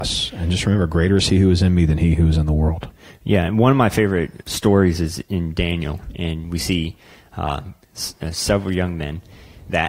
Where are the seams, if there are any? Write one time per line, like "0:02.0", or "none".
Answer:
0:04.4